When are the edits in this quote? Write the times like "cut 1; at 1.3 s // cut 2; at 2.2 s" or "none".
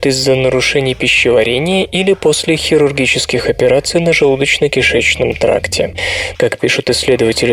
cut 1; at 6.4 s